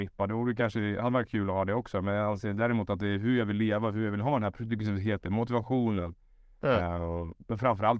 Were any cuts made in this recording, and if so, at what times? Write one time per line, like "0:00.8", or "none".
none

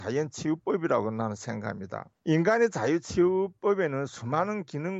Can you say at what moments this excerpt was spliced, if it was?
0:02.2

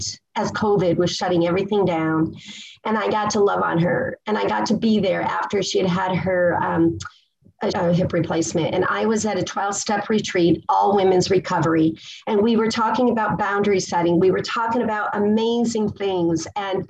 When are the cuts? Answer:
0:07.7

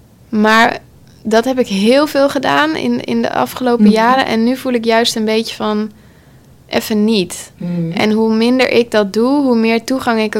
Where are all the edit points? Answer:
none

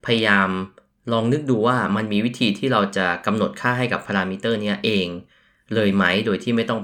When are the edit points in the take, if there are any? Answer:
none

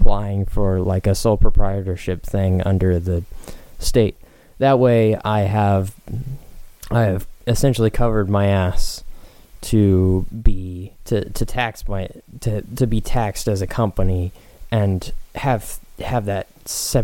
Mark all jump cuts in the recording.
0:06.8
0:11.0

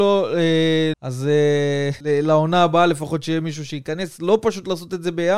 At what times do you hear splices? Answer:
0:00.9
0:02.0

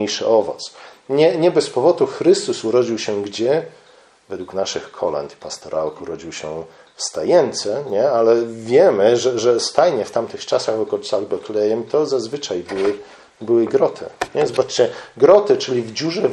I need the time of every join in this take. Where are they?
none

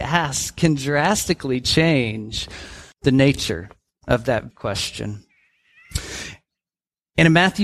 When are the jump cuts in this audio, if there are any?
0:02.9
0:04.5

